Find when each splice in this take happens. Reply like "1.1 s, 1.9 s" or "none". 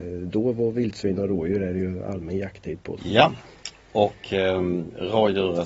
3.0 s